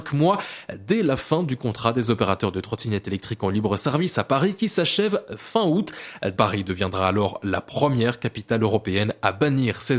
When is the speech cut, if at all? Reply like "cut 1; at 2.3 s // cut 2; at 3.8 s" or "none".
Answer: cut 1; at 6.4 s